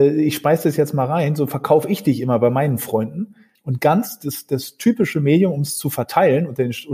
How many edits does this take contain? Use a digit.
1